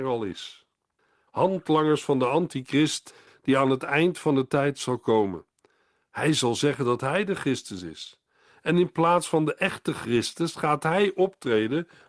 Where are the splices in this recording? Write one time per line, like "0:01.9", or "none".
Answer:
0:01.3